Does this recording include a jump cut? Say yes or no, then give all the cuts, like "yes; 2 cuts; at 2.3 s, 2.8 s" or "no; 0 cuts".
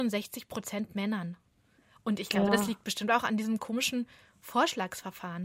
no; 0 cuts